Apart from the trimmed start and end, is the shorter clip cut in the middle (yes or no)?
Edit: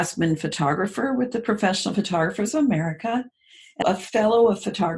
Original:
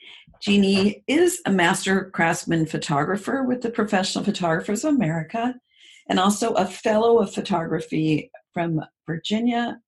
yes